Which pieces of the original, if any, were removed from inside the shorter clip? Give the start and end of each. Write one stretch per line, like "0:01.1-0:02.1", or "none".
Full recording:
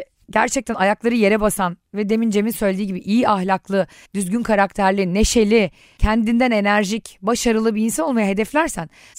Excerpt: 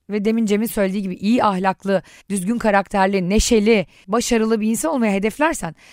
0:05.9-0:07.2